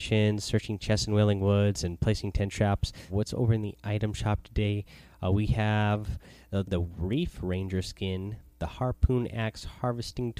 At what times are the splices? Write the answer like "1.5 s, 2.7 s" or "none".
3.1 s, 6.6 s